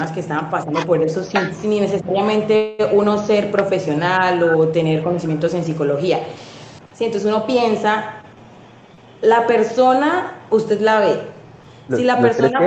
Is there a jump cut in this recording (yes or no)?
yes